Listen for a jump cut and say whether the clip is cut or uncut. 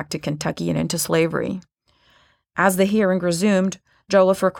uncut